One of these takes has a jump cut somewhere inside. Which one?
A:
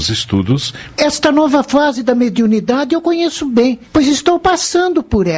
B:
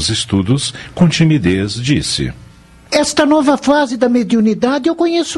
A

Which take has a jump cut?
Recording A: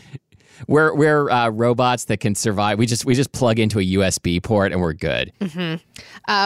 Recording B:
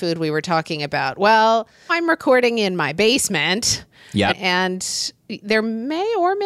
B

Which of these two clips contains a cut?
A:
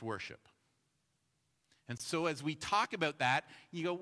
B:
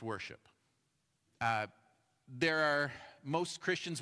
B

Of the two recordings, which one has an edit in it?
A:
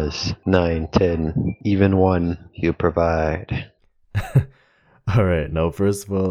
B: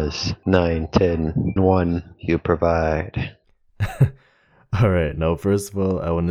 B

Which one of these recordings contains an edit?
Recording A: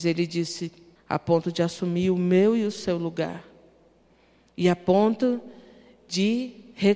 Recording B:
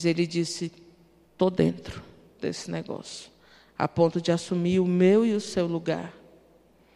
A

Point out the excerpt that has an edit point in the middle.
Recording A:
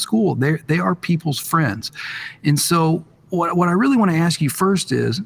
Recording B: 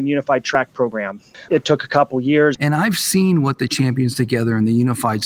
B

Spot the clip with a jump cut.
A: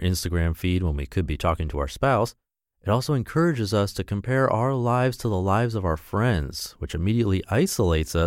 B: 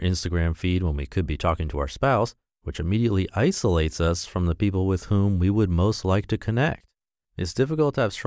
B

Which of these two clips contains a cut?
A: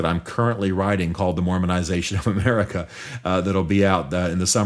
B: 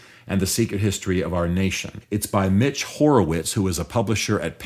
B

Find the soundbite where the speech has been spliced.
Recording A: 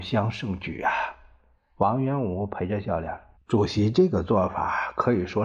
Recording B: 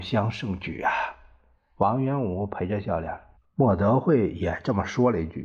B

